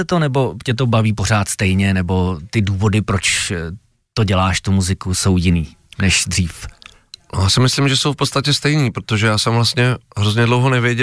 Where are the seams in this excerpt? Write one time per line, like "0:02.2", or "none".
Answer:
none